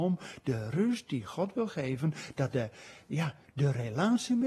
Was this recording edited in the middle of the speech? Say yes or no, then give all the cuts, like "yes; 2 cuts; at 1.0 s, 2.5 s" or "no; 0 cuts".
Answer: yes; 1 cut; at 3.4 s